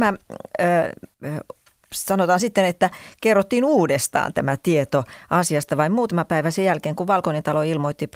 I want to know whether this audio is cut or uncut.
cut